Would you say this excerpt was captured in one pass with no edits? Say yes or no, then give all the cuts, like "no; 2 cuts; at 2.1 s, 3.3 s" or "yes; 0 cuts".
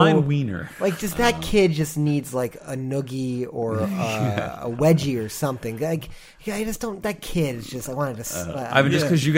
yes; 0 cuts